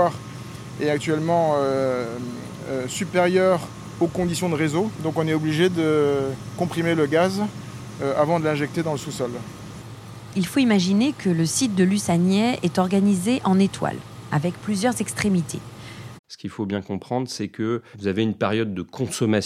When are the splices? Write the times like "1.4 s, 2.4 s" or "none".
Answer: 16.2 s